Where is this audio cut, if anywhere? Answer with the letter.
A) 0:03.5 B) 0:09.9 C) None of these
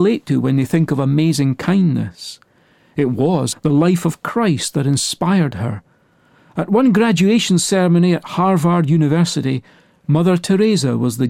A